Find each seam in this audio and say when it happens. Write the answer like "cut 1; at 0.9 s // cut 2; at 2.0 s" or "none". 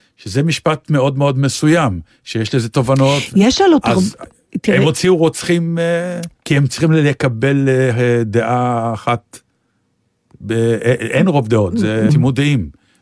cut 1; at 6.4 s // cut 2; at 12.1 s